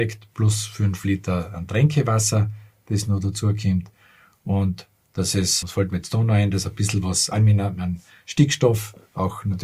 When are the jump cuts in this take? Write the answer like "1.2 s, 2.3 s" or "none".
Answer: 5.6 s, 7.3 s